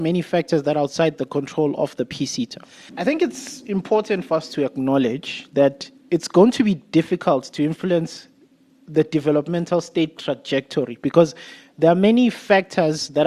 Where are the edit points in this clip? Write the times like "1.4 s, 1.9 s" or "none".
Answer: 2.9 s, 6.0 s